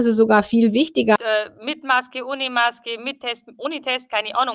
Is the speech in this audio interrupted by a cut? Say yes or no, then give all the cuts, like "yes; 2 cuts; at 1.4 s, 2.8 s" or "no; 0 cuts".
yes; 1 cut; at 1.2 s